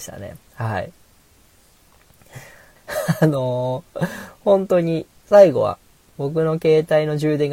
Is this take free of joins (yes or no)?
no